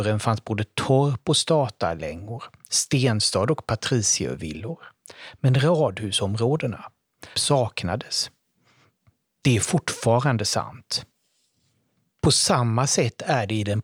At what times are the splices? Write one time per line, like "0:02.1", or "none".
0:07.3